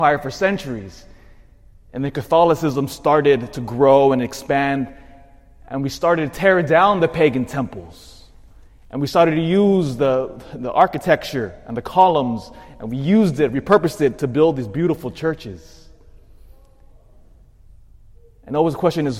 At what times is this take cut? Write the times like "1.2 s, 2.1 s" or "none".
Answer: none